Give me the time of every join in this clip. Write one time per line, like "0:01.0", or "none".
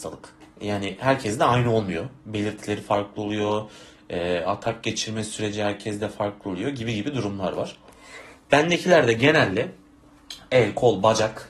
none